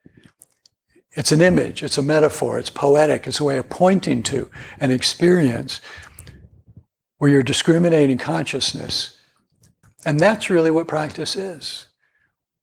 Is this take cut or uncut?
cut